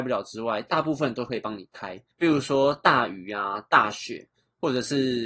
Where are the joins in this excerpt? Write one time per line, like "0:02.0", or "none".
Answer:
0:02.1